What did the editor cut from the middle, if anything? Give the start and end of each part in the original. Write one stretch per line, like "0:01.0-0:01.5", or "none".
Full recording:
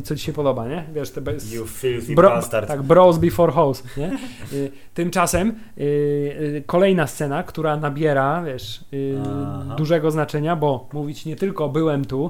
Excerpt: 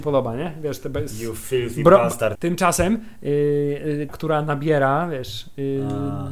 0:02.7-0:04.9
0:06.6-0:07.4